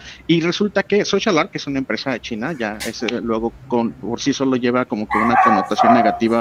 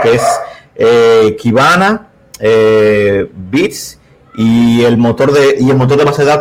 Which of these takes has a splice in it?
first; 1 cut; at 3.6 s

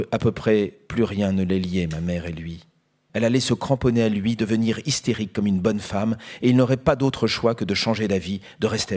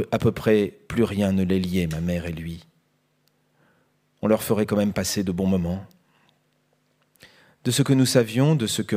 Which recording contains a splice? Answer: first; 1 cut; at 3.1 s

